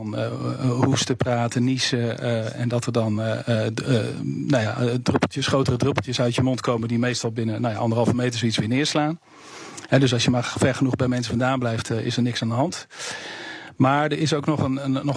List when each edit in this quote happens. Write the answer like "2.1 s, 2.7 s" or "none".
none